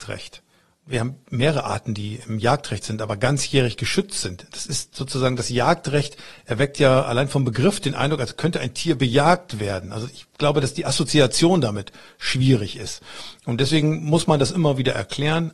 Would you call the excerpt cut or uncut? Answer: uncut